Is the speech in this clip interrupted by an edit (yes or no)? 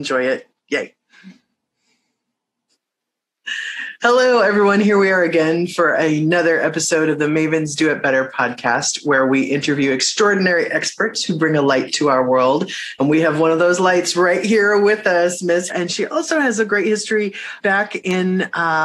yes